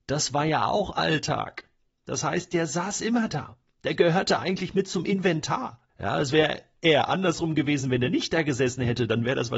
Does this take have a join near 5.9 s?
yes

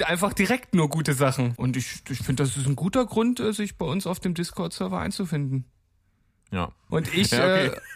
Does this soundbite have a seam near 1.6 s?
yes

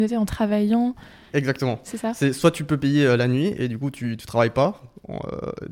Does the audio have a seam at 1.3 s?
no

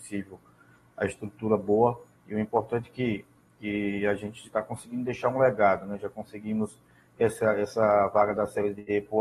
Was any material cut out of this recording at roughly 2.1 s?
yes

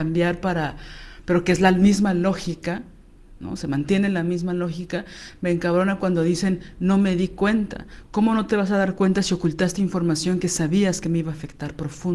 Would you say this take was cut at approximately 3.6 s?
no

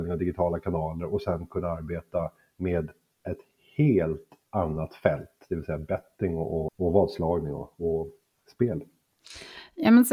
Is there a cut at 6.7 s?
yes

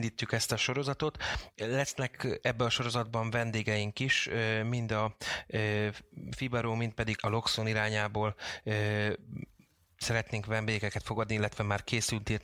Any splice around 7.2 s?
yes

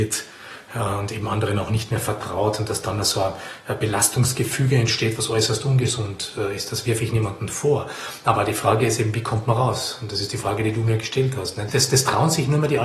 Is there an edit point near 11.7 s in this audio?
yes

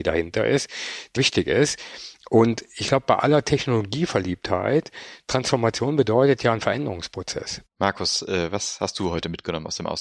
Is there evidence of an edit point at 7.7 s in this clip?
yes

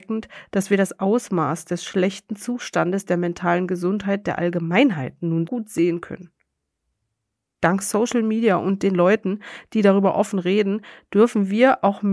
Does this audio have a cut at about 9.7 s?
no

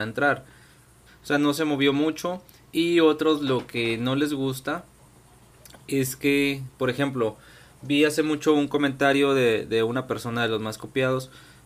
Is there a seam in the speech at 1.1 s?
yes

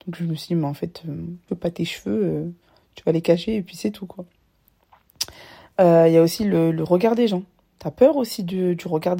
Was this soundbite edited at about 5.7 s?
no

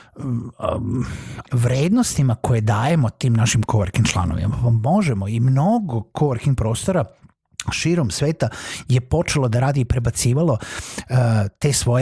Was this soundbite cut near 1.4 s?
yes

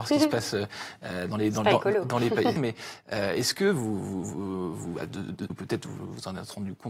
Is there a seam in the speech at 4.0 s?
no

